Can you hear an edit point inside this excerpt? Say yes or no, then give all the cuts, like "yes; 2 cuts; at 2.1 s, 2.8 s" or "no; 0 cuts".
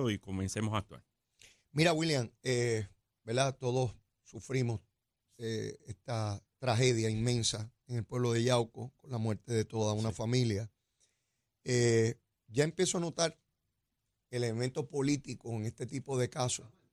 no; 0 cuts